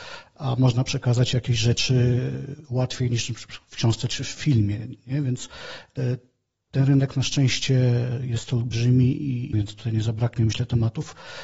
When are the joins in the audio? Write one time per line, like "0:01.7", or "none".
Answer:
0:09.5